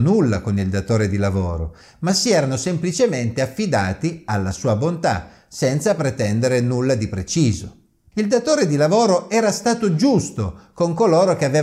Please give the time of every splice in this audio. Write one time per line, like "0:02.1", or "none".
none